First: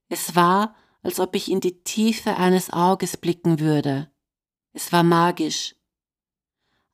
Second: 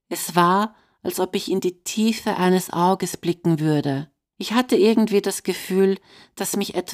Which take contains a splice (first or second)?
second